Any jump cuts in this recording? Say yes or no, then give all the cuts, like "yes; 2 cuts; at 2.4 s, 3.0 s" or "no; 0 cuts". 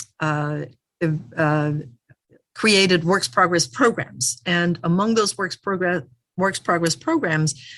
no; 0 cuts